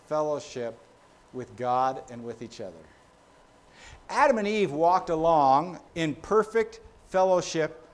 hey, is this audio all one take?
no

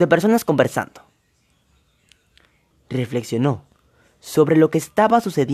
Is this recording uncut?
no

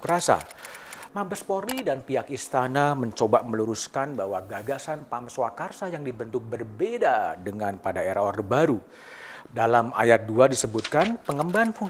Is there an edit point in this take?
yes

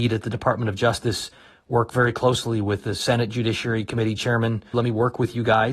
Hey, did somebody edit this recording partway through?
yes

